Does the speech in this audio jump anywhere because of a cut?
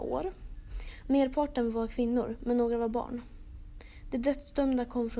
yes; 1 cut; at 1.0 s

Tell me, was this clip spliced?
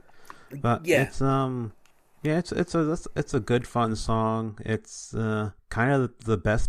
yes; 1 cut; at 5.6 s

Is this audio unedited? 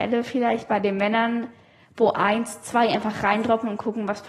yes; 0 cuts

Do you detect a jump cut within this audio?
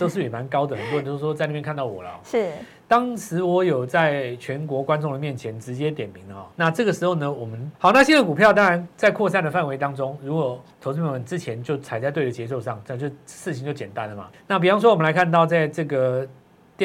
yes; 3 cuts; at 6.5 s, 7.7 s, 14.3 s

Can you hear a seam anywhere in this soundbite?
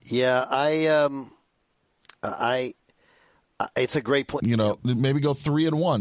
yes; 1 cut; at 4.4 s

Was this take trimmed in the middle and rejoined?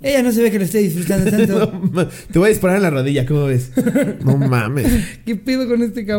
no; 0 cuts

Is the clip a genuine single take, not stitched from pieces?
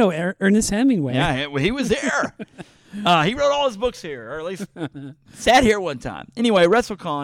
yes; 0 cuts

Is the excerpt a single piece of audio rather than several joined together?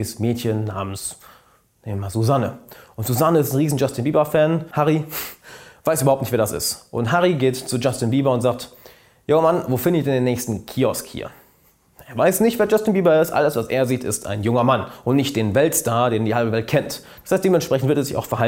yes; 0 cuts

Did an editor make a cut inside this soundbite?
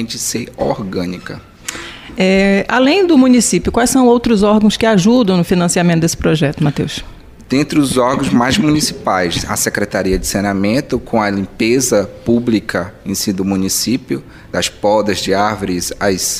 no; 0 cuts

